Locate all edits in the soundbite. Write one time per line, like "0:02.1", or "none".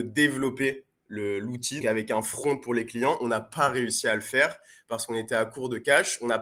0:01.8